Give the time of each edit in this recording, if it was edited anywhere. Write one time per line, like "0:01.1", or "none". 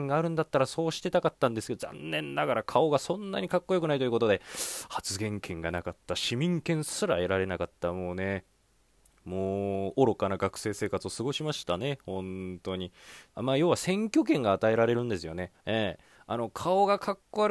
0:13.3
0:15.5